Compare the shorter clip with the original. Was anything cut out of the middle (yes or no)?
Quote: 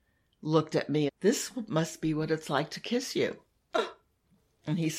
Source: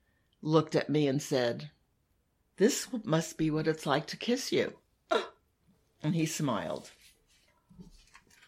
yes